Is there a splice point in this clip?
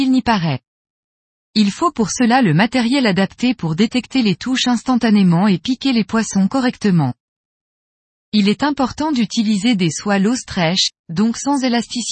no; 0 cuts

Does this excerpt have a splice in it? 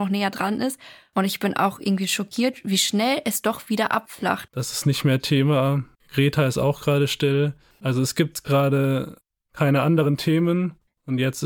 yes; 2 cuts; at 4.5 s, 6.0 s

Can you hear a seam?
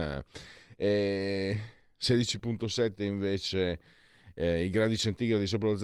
no; 0 cuts

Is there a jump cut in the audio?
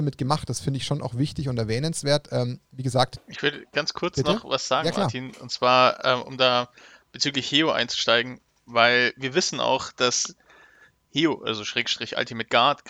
no; 0 cuts

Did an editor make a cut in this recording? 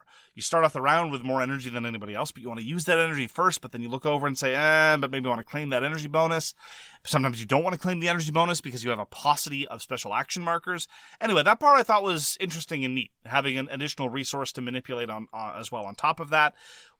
no; 0 cuts

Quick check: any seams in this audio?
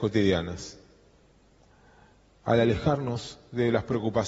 no; 0 cuts

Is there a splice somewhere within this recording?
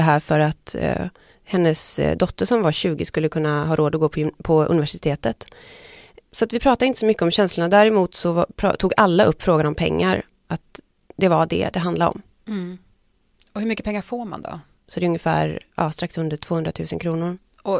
yes; 1 cut; at 14.8 s

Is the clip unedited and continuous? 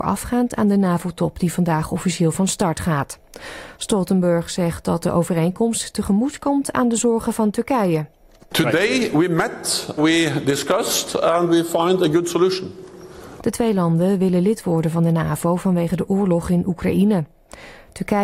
no; 2 cuts; at 10.0 s, 13.4 s

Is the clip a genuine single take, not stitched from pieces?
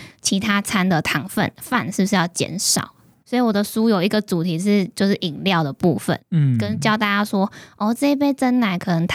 no; 1 cut; at 3.2 s

